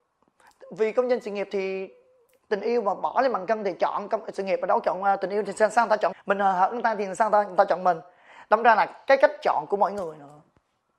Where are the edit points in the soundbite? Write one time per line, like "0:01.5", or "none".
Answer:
0:06.1